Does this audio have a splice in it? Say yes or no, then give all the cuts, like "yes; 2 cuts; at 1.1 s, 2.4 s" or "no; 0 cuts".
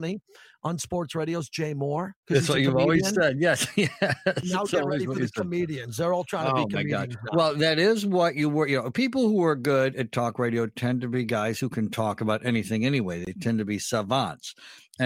no; 0 cuts